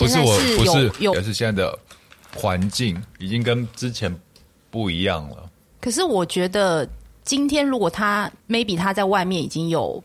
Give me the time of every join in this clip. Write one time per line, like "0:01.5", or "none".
0:01.1